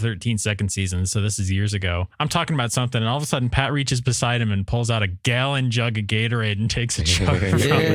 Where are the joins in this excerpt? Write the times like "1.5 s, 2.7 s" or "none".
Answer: none